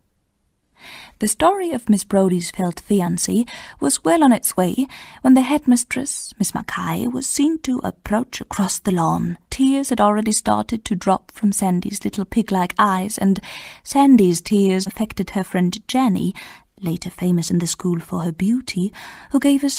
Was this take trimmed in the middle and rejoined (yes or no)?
yes